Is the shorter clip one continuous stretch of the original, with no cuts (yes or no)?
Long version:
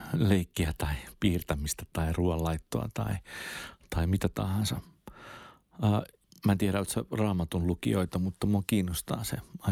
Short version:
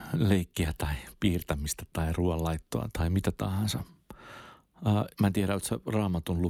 no